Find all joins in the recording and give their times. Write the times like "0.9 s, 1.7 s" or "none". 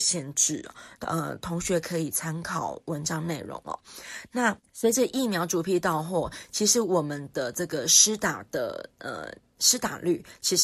1.0 s